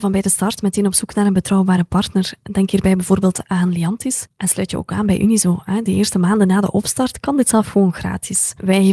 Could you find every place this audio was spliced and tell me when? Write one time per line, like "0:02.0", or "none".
none